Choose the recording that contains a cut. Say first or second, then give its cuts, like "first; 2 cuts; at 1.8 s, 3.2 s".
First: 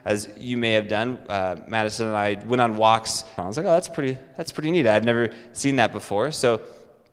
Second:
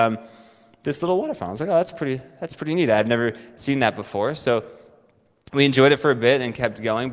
first; 1 cut; at 3.4 s